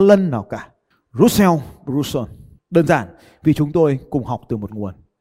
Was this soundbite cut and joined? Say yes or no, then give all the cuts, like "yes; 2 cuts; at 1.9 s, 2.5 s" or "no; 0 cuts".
yes; 2 cuts; at 0.9 s, 2.6 s